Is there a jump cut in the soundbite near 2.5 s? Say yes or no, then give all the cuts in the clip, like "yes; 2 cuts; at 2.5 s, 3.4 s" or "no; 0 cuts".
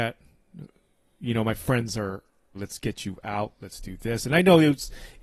yes; 1 cut; at 2.5 s